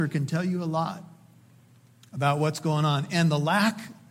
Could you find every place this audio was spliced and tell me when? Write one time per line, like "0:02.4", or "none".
none